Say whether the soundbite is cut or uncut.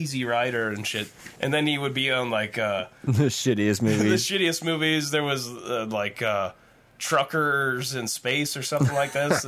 uncut